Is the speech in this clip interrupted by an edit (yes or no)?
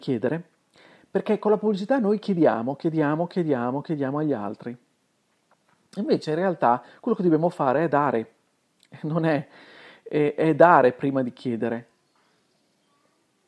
no